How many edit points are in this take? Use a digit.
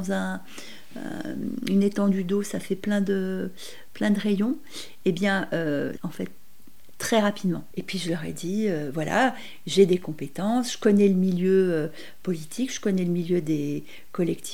2